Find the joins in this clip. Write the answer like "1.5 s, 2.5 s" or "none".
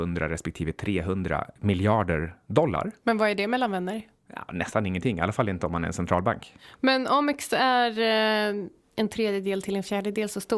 none